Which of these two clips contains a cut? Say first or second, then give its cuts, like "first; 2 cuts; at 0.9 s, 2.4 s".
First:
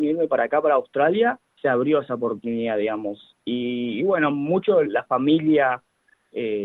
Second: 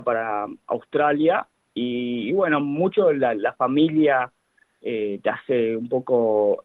first; 2 cuts; at 3.3 s, 4.8 s